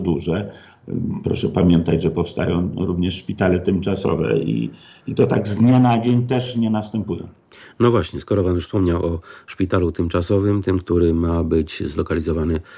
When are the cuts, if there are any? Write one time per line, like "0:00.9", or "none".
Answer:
none